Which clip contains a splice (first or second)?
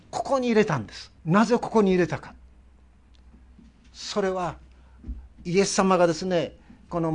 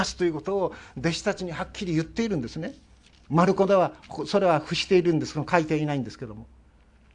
first